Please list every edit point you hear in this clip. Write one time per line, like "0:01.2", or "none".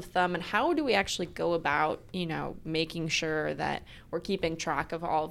0:02.1